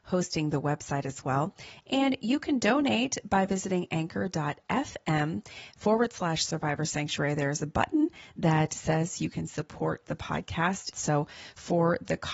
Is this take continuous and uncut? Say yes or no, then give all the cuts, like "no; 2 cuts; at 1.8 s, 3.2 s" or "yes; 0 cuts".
no; 1 cut; at 10.9 s